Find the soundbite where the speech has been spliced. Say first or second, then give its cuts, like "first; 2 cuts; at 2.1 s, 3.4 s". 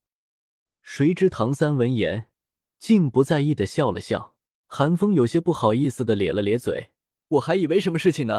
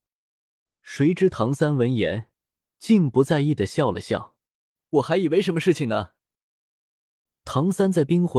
first; 2 cuts; at 4.6 s, 7.1 s